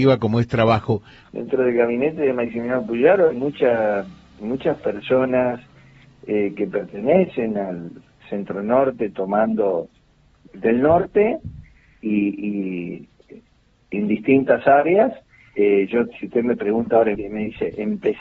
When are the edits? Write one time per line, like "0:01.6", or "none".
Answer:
0:01.2
0:15.5
0:17.2